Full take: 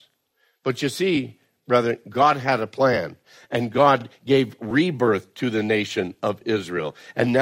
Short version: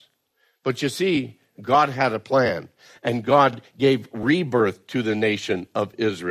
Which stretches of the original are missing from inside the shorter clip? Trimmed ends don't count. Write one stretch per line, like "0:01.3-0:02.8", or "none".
0:01.5-0:02.0